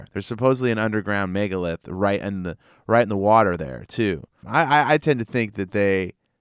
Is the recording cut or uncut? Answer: cut